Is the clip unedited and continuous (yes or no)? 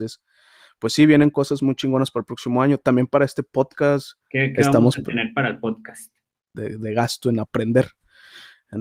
no